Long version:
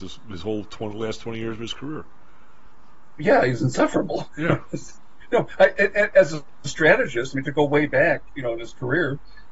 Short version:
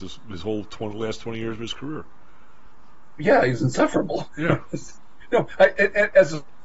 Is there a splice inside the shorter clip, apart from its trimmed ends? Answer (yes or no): no